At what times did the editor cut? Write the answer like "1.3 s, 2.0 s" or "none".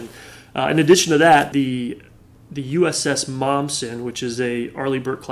1.5 s